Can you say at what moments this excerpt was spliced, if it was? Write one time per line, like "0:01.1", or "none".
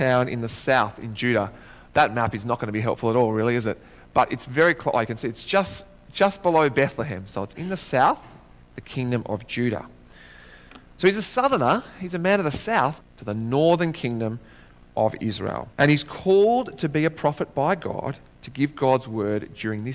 0:13.0
0:15.7

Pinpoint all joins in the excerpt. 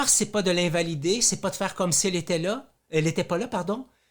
none

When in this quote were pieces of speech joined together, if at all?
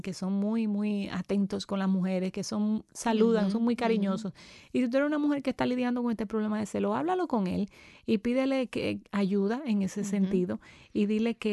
none

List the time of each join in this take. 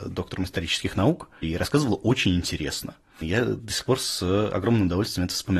0:01.4
0:03.2

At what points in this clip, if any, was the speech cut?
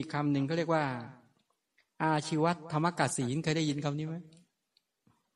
none

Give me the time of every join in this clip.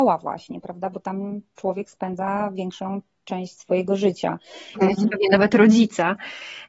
0:04.7

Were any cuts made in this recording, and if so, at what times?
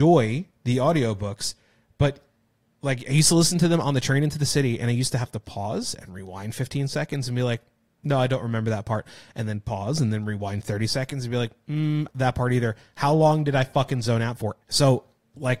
0:12.1
0:14.6

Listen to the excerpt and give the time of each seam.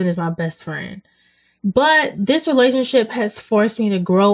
none

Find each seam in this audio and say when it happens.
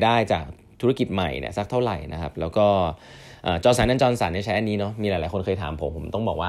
none

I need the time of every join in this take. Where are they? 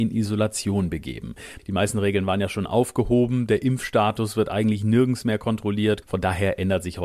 0:01.6
0:06.0

